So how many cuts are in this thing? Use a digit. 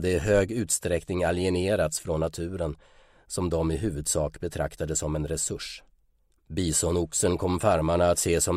1